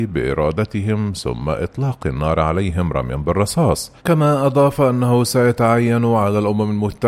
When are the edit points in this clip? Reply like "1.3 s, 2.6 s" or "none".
4.0 s